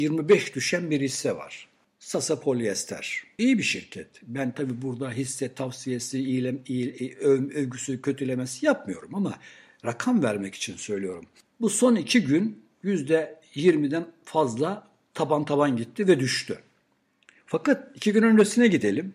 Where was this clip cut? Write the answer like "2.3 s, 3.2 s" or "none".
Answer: none